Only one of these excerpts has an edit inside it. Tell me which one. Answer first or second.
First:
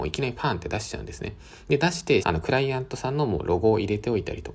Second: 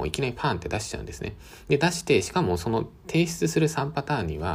first